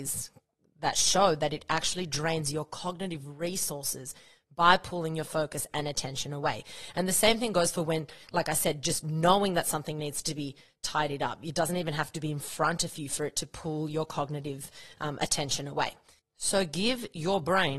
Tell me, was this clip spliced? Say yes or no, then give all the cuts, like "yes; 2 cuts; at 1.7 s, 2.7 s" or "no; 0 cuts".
no; 0 cuts